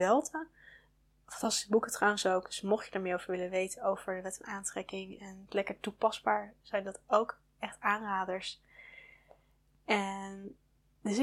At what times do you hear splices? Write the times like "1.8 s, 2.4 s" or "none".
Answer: none